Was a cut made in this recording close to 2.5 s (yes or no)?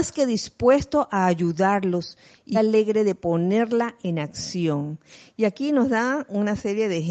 yes